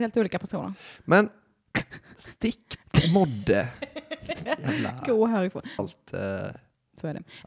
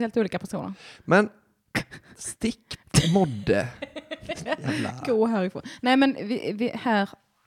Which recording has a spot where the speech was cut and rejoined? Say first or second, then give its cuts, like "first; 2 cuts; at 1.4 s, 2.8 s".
first; 1 cut; at 5.8 s